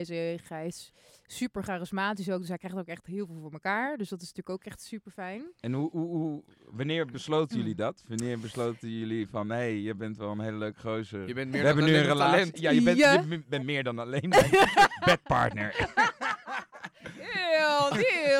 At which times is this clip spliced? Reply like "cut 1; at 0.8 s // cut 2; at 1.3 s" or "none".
none